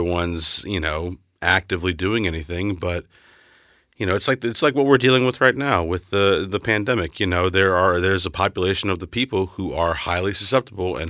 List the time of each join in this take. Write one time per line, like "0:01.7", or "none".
none

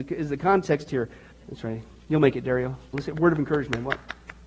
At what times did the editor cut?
0:01.3
0:02.9

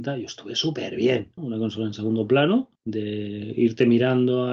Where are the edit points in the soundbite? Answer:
0:01.4
0:02.8

